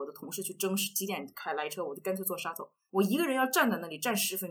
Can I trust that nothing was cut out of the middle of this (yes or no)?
no